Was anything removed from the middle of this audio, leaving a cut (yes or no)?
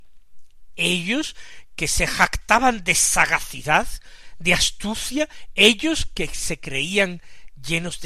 no